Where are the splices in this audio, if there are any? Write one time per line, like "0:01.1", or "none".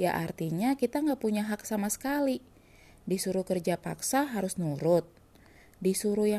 none